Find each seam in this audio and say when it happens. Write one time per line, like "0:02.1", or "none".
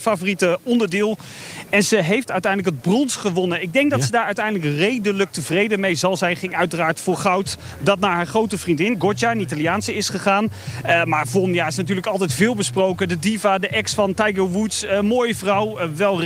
none